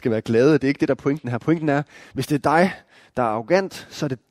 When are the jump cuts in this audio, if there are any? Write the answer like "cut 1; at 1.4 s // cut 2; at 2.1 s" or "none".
none